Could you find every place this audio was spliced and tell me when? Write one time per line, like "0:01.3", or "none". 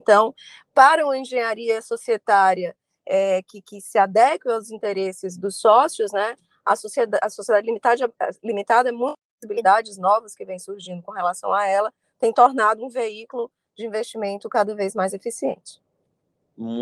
0:09.3